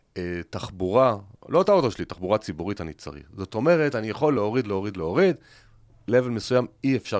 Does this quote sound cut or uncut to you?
uncut